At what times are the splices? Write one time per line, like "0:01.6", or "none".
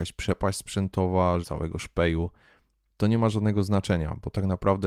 0:01.4